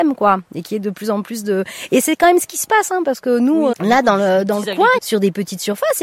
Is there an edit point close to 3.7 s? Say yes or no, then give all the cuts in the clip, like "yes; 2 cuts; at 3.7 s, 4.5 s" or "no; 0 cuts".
yes; 2 cuts; at 3.7 s, 5.0 s